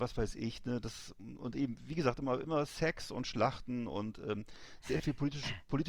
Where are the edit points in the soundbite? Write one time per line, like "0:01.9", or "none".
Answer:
none